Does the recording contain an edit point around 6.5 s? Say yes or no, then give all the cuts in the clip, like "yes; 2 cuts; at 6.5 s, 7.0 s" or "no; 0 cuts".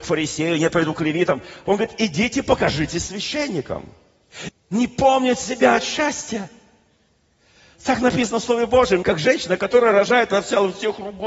no; 3 cuts; at 1.7 s, 4.5 s, 9.0 s